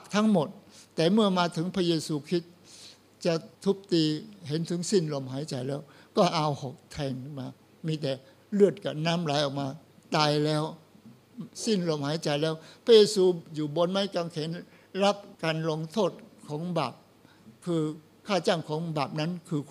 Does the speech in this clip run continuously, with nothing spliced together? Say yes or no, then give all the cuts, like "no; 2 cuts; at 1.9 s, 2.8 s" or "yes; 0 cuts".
no; 2 cuts; at 3.5 s, 15.3 s